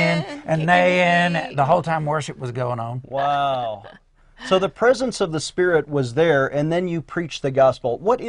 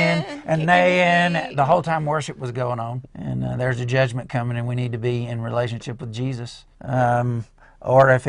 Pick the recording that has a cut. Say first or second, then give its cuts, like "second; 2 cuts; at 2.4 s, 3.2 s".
second; 2 cuts; at 3.1 s, 6.7 s